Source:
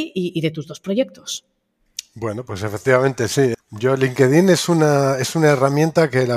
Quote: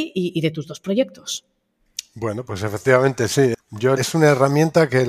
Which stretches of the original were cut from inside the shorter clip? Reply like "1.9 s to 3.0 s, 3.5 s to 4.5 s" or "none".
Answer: 4.0 s to 5.2 s